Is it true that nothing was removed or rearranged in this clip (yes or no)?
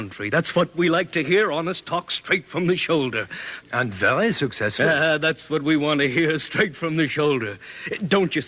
no